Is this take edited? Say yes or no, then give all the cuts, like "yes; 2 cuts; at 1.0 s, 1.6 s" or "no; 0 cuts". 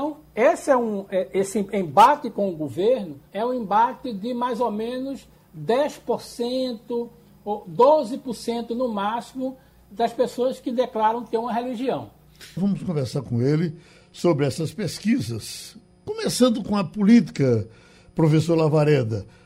yes; 2 cuts; at 3.3 s, 12.6 s